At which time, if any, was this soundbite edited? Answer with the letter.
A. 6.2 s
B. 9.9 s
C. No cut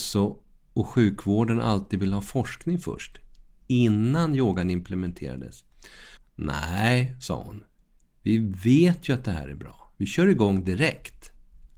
A